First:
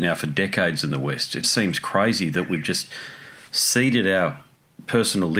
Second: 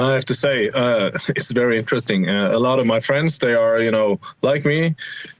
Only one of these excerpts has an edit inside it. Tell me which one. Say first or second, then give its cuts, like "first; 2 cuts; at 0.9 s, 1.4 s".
first; 1 cut; at 1.4 s